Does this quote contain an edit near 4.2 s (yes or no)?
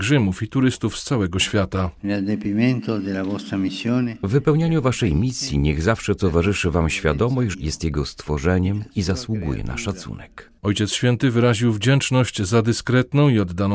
no